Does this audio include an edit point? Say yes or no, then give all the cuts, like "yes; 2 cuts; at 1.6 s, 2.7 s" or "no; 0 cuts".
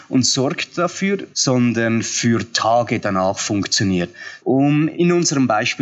yes; 2 cuts; at 1.3 s, 4.4 s